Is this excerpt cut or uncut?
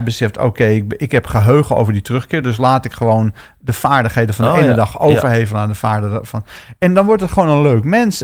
uncut